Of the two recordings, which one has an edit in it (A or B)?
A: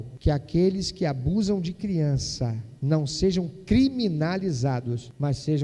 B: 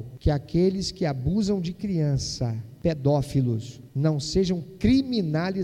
A